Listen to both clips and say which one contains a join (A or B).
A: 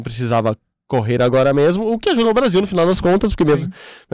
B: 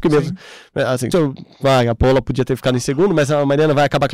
B